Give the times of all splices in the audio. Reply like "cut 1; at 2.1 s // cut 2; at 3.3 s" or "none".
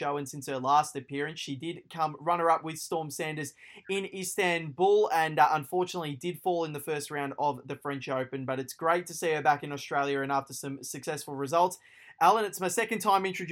none